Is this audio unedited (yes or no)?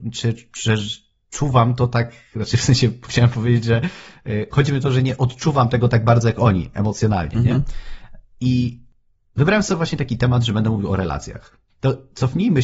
no